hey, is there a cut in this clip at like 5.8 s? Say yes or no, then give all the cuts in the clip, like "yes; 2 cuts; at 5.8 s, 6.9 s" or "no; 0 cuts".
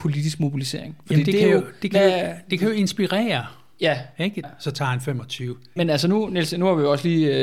yes; 2 cuts; at 4.4 s, 5.8 s